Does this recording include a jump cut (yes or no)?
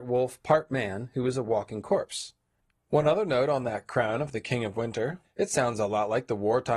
yes